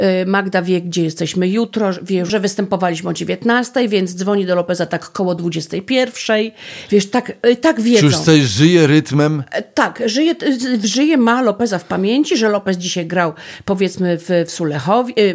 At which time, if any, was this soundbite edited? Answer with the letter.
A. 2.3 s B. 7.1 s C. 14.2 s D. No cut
A